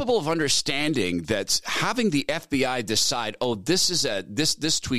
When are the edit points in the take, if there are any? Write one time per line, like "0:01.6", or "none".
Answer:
none